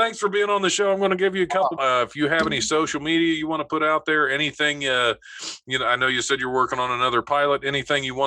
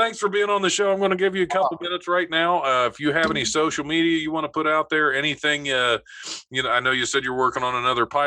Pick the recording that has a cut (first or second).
first